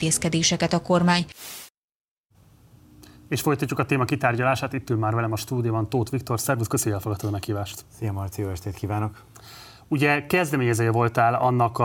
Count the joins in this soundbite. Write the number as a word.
zero